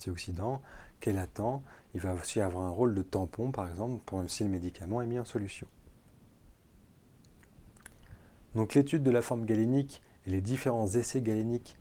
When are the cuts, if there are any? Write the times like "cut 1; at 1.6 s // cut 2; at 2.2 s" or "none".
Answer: none